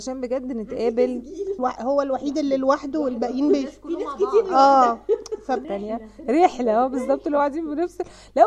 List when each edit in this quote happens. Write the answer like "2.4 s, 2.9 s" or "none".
1.6 s, 5.6 s